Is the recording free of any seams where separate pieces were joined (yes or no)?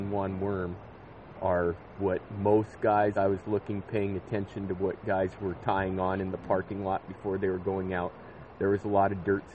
yes